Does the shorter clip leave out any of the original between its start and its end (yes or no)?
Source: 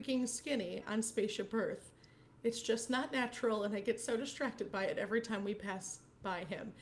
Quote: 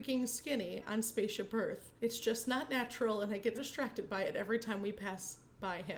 yes